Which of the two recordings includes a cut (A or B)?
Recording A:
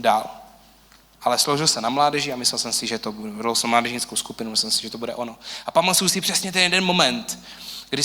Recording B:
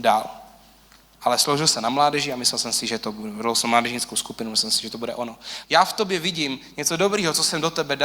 B